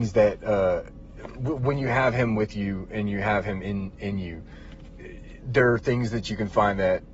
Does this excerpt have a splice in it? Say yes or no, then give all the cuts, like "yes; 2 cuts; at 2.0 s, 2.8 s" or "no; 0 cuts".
no; 0 cuts